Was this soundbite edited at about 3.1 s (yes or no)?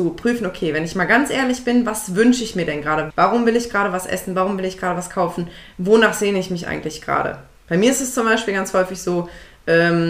yes